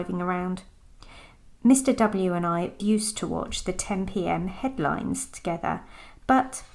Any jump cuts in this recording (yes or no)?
yes